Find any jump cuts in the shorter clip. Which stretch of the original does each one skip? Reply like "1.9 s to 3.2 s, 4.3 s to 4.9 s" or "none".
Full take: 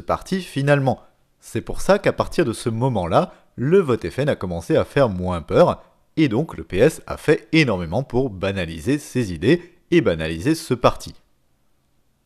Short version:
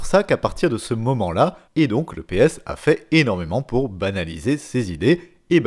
3.4 s to 6.1 s

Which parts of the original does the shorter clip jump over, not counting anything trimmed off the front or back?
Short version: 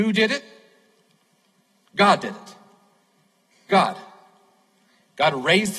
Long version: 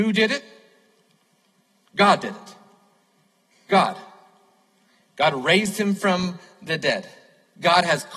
none

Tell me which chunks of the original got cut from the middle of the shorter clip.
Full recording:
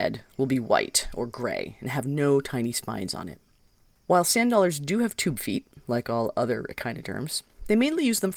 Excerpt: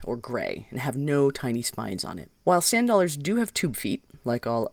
3.5 s to 4.0 s

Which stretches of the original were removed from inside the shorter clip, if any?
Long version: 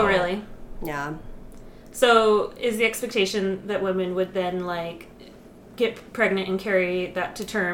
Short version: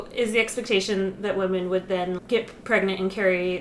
4.6 s to 5.7 s

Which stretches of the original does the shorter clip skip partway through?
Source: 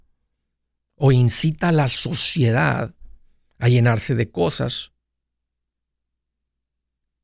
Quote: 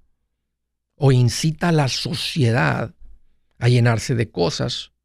none

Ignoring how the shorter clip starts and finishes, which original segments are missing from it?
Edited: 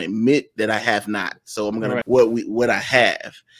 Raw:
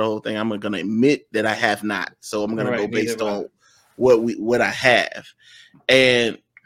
2.8 s to 3.9 s

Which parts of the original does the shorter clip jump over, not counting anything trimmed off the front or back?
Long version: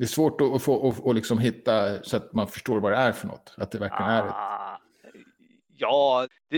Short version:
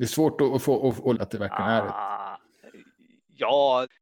1.1 s to 3.6 s

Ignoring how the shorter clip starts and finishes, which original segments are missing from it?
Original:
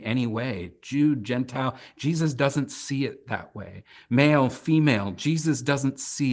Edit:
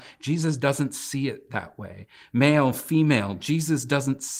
none

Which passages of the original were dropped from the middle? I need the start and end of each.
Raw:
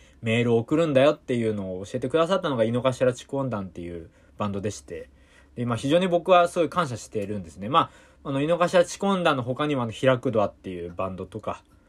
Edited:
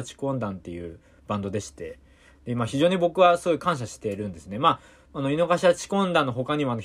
none

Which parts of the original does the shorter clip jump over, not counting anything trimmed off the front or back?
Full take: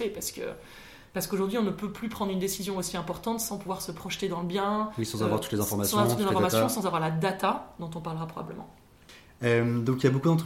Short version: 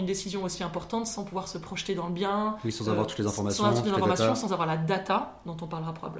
none

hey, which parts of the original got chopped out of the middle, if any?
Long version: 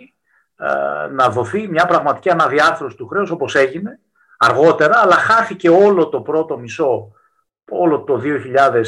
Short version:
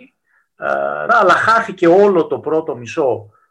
1.1 s to 4.9 s

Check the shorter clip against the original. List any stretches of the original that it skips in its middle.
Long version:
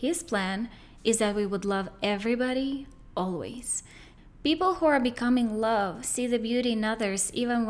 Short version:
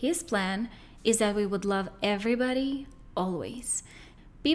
none

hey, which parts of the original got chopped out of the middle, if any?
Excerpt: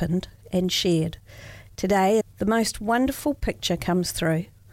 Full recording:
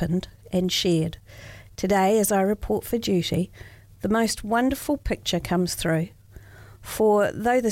2.2 s to 3.8 s

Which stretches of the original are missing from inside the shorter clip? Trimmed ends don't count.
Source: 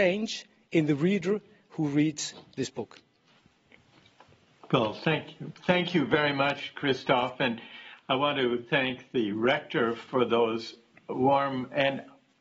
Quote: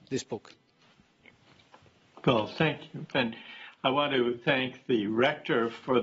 5.6 s to 7.4 s

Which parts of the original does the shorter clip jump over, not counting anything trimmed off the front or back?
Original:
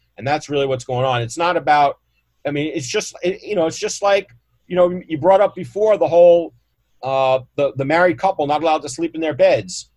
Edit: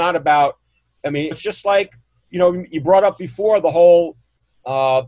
2.7 s to 3.7 s

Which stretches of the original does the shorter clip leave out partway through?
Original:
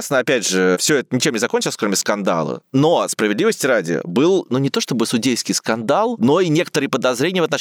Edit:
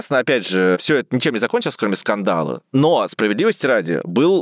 none

